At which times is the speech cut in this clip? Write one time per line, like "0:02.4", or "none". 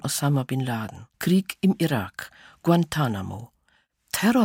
0:01.1